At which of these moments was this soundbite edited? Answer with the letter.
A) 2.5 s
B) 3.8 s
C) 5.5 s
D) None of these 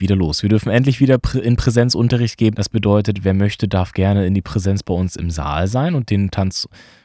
A